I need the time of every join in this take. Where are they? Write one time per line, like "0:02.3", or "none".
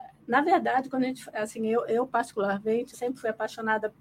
0:02.9

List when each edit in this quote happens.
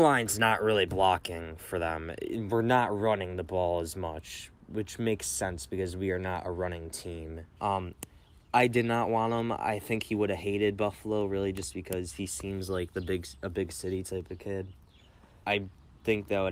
0:07.6
0:15.4

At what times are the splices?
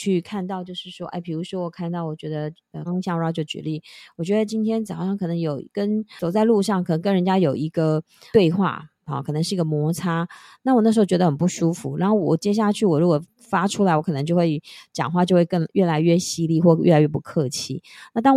0:02.9

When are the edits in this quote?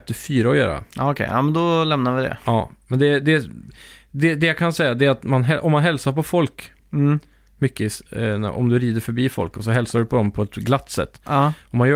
none

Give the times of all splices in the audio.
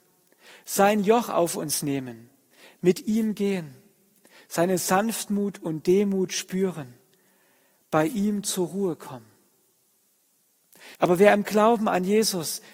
0:11.0

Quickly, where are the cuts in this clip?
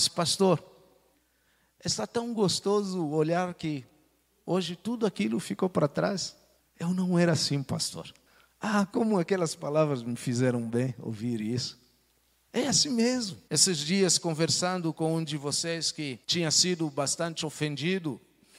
0:13.5
0:16.2

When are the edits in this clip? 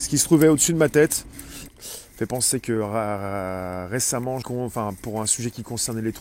0:01.7
0:04.4

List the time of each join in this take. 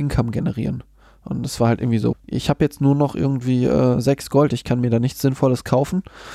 0:02.1

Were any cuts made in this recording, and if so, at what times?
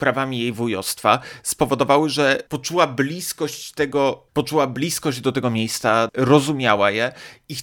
0:02.5
0:04.3
0:06.1

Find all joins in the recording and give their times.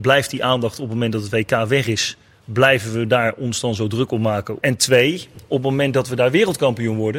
0:04.6

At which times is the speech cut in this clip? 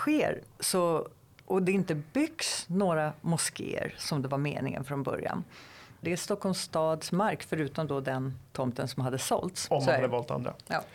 0:06.0
0:09.7

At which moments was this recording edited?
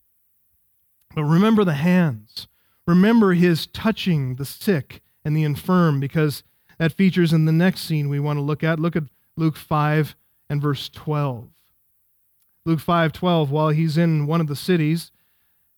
none

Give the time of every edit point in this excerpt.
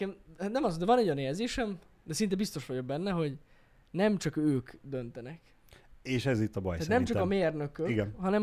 none

